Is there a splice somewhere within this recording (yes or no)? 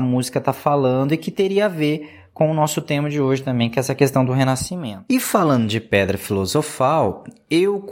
no